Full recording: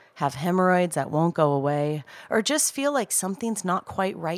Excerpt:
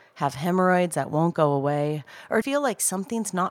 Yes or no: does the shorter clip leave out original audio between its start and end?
yes